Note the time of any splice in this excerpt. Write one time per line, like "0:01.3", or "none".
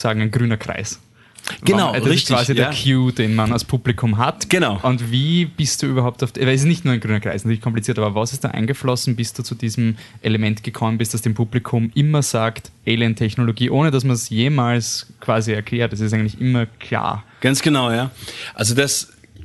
0:04.5